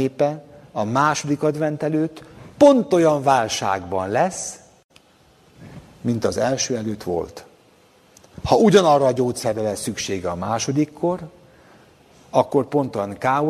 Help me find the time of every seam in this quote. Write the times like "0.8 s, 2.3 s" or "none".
none